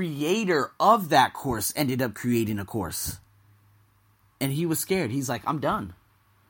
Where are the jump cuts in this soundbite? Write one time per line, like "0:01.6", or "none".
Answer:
none